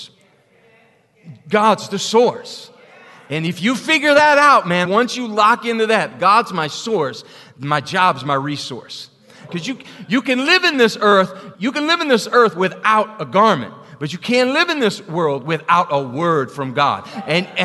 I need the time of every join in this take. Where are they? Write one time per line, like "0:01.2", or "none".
0:04.8
0:09.5
0:11.5